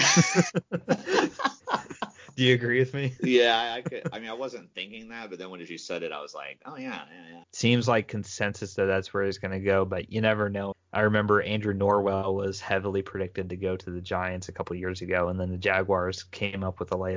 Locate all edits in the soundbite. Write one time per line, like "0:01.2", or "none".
0:07.4
0:10.7